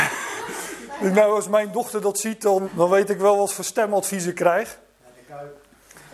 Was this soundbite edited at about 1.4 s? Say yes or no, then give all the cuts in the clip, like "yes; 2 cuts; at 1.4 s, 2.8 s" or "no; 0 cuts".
no; 1 cut; at 2.6 s